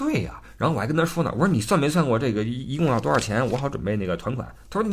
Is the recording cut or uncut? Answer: uncut